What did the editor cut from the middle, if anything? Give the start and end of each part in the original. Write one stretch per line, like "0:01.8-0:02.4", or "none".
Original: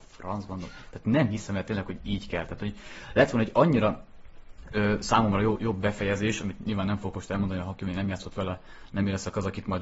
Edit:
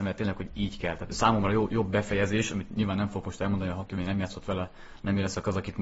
0:02.6-0:05.0